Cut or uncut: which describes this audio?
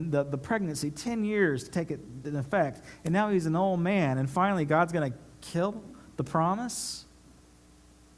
uncut